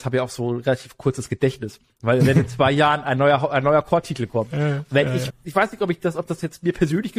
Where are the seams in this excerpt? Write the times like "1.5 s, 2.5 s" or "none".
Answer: 5.3 s